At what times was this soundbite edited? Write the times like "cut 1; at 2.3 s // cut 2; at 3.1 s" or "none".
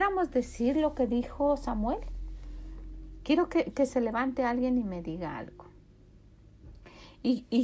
none